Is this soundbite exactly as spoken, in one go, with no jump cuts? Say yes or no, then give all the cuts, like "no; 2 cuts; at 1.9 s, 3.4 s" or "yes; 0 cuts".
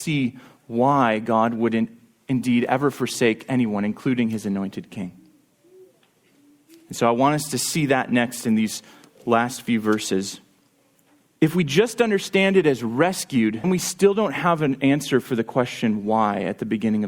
no; 2 cuts; at 11.3 s, 13.6 s